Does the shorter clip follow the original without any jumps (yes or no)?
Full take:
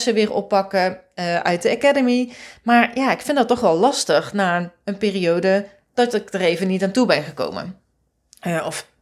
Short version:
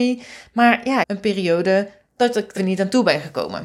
no